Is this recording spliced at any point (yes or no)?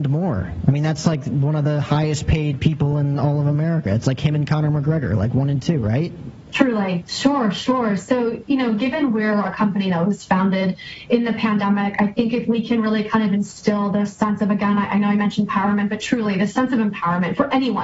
yes